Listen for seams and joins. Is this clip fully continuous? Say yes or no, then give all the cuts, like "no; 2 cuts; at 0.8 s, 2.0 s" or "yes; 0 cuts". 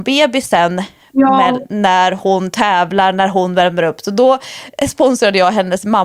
yes; 0 cuts